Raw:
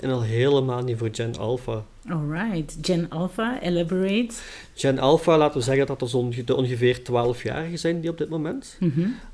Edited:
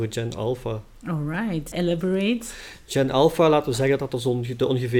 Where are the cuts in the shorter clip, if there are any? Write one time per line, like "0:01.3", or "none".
0:01.7